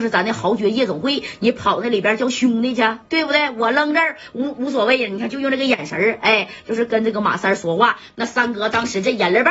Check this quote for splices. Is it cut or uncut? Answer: uncut